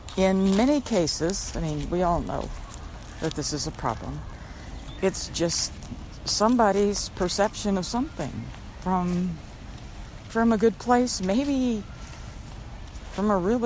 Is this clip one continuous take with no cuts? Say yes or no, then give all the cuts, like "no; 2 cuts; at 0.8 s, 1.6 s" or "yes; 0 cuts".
no; 3 cuts; at 1.5 s, 5.0 s, 10.3 s